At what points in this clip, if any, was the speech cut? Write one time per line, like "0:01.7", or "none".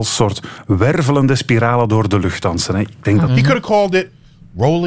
0:03.3